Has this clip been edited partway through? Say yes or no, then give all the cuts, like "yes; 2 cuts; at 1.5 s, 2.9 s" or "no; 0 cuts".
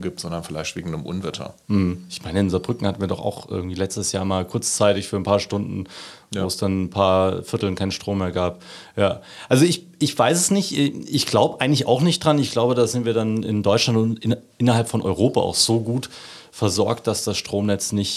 no; 0 cuts